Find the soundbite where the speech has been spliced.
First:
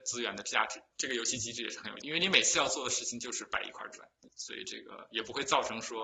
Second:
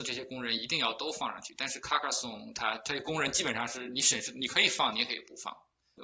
first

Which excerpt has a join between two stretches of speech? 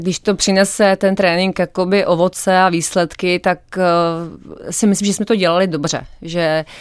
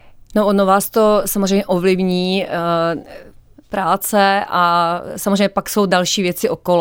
second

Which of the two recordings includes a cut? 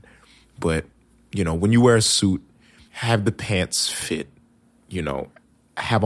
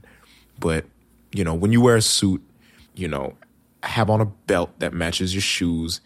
second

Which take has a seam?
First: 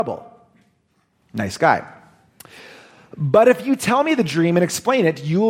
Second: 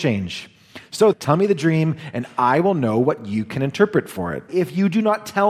second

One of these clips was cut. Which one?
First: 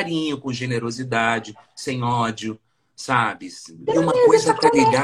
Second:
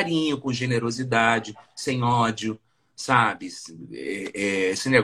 first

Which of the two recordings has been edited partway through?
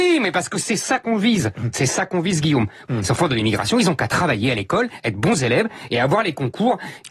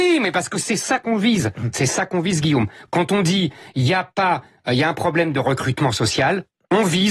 first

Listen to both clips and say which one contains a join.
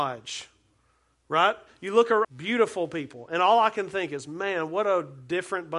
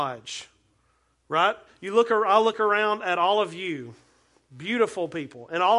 first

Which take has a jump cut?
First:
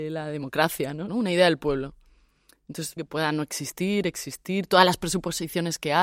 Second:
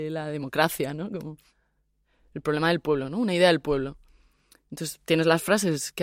first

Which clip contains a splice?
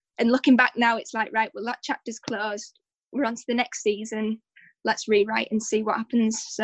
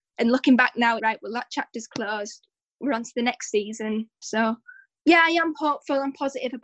second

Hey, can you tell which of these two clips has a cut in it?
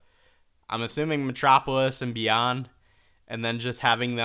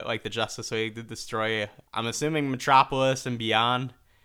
second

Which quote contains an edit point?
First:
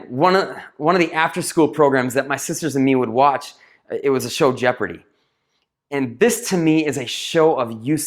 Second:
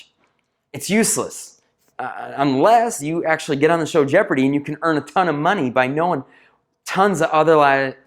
second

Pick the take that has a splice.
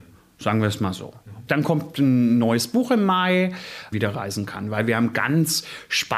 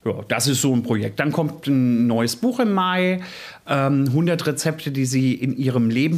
first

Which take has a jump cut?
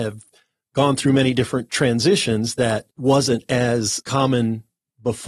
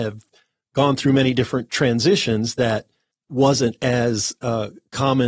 first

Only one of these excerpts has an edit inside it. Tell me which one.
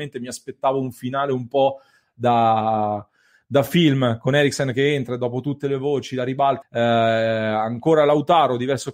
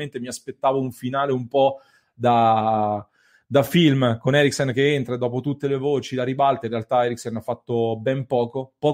first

